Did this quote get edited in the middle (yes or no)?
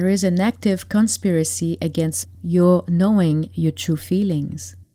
no